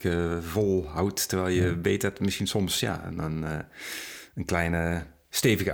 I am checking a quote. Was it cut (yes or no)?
no